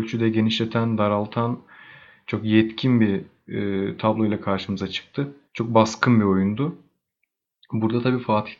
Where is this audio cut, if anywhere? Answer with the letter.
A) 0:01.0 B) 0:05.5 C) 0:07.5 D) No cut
B